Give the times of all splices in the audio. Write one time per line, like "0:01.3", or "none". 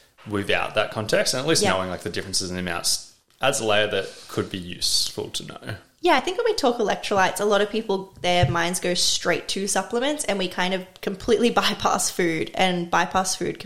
none

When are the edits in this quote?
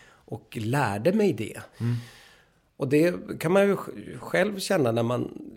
0:01.7

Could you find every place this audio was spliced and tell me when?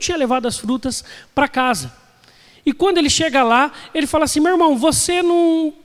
none

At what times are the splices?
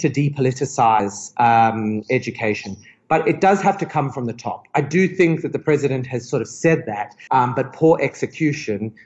0:07.3

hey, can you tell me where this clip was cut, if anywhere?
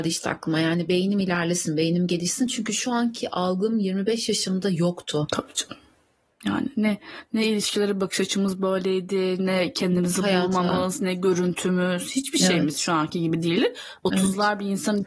none

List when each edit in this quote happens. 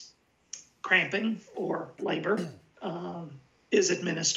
0:02.7

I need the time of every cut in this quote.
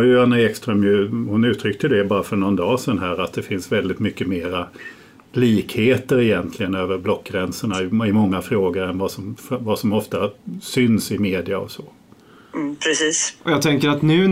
0:13.4

